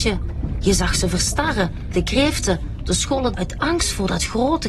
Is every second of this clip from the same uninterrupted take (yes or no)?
no